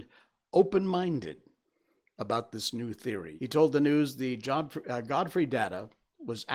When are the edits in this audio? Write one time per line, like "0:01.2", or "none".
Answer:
0:03.4